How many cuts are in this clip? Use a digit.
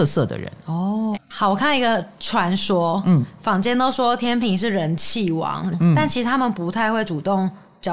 2